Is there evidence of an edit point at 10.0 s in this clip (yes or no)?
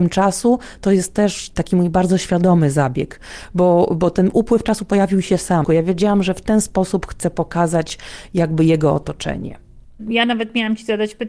no